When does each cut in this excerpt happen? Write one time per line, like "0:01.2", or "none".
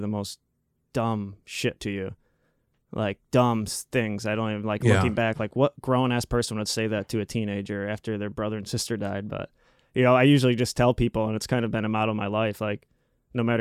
none

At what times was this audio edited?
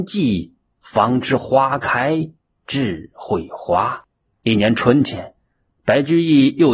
0:04.3

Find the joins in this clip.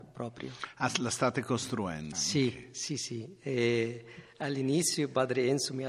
0:02.1

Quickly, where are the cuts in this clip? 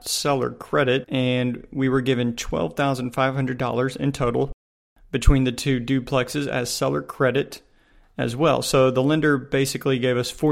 0:01.0

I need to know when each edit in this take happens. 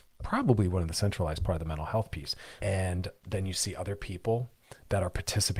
0:02.6

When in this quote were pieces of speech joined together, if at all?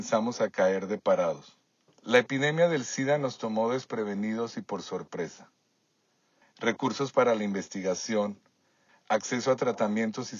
0:01.9
0:06.4
0:08.9

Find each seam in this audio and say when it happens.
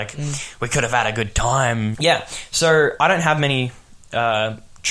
0:01.9

